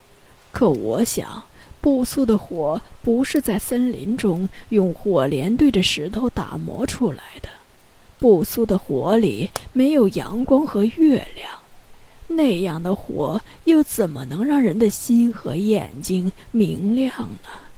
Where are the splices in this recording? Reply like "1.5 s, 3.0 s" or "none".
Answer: none